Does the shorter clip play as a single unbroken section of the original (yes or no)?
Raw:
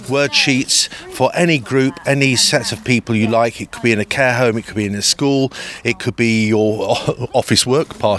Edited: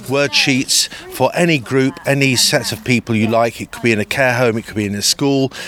yes